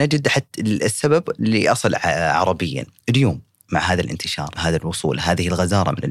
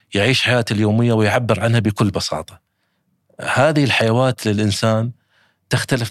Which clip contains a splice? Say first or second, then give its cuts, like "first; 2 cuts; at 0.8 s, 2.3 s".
first; 1 cut; at 4.6 s